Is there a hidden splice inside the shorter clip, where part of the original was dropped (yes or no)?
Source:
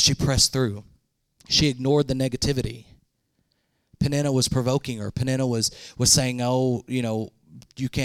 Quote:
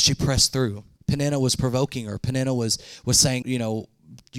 yes